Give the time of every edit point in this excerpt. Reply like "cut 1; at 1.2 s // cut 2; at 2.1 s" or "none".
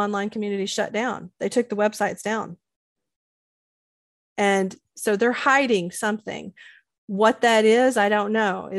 none